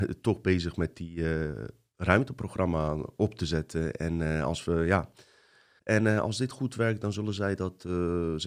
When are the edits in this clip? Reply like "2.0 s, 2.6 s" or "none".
5.8 s

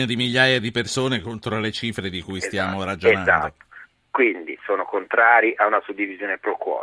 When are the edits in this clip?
none

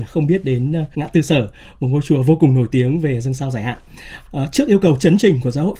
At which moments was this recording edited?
0.9 s, 4.3 s

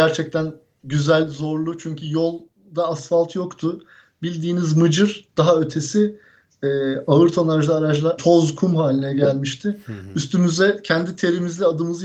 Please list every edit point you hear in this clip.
8.2 s

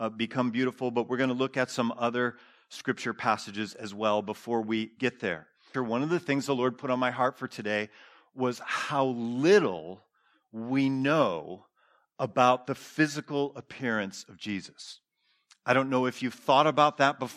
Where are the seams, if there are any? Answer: 5.7 s

